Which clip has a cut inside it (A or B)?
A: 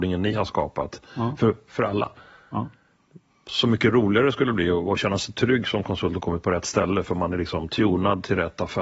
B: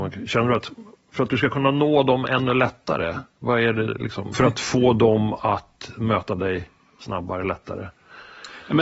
B